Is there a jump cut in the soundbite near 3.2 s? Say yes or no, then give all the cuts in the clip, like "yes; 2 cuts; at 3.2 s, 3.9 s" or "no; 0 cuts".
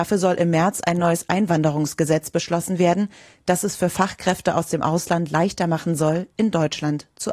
no; 0 cuts